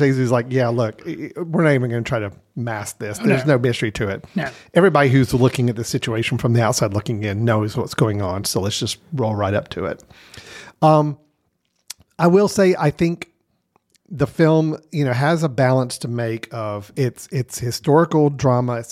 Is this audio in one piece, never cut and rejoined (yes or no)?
yes